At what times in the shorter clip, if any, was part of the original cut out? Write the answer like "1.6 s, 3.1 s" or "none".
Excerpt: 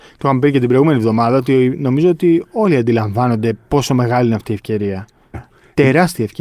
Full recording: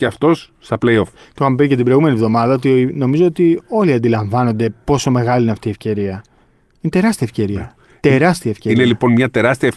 5.3 s